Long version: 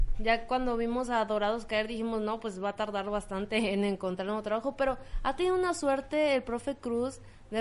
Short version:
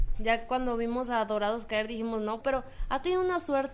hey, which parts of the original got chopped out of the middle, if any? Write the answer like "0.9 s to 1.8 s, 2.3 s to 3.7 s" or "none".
2.4 s to 4.7 s